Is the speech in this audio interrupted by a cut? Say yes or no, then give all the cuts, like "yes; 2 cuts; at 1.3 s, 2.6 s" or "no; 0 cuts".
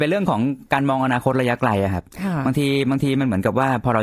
no; 0 cuts